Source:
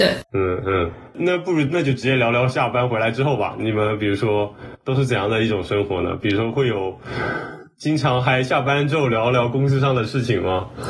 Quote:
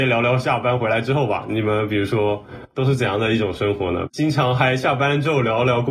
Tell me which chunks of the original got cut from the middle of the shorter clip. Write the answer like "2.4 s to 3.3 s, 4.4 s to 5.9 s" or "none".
6.2 s to 7.7 s